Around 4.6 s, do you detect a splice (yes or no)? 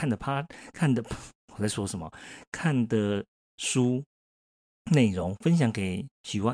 no